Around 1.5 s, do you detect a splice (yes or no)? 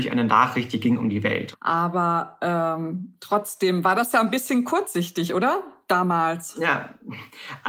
yes